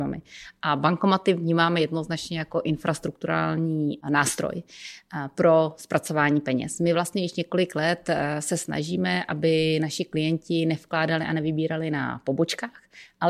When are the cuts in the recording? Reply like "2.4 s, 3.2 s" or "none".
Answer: none